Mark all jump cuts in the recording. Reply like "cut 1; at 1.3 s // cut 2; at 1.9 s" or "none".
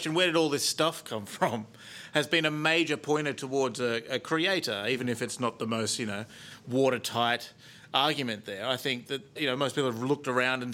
cut 1; at 9.4 s